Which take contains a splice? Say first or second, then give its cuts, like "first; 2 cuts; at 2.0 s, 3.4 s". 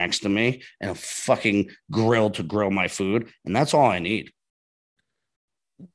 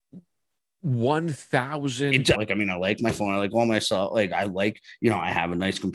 second; 1 cut; at 2.3 s